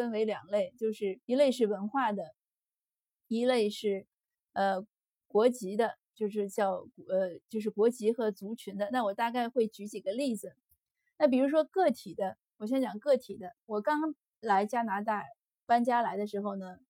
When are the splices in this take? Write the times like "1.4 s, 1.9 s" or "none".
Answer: 1.2 s